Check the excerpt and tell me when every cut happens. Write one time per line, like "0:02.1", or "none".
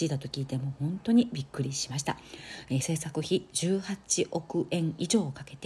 none